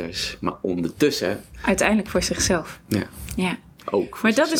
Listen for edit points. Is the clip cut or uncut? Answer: uncut